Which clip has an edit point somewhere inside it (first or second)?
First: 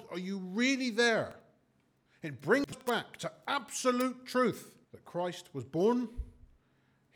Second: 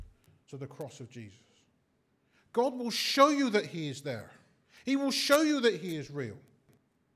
first